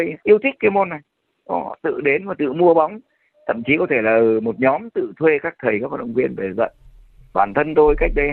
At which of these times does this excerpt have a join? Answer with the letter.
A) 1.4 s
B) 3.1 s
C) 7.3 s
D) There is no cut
D